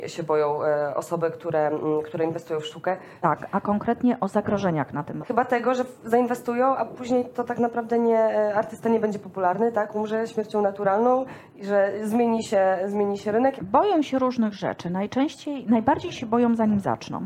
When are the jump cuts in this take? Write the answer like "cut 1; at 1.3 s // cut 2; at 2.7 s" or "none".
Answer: cut 1; at 3.2 s // cut 2; at 5.2 s // cut 3; at 13.6 s